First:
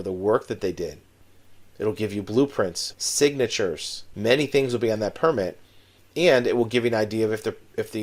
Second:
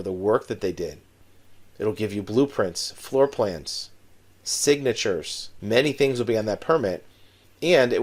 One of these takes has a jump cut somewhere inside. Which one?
first; 1 cut; at 2.9 s

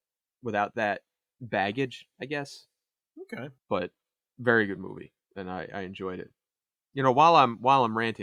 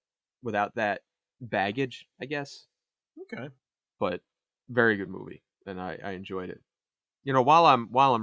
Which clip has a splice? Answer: first; 1 cut; at 3.6 s

